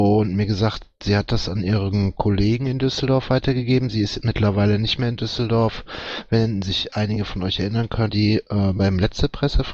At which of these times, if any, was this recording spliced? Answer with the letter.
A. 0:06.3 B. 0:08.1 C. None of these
B